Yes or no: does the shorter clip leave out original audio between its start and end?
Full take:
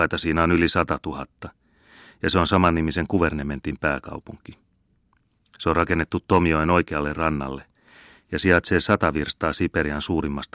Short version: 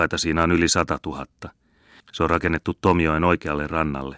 yes